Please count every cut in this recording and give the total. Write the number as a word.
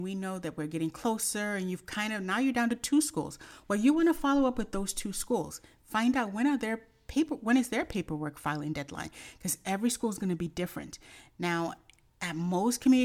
zero